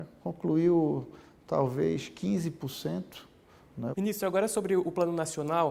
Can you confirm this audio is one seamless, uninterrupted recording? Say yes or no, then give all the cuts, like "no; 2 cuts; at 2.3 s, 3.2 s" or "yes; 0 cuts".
no; 1 cut; at 3.9 s